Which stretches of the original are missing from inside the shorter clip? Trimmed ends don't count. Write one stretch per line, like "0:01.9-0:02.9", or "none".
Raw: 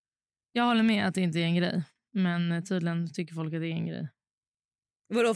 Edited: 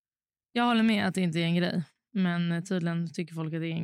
none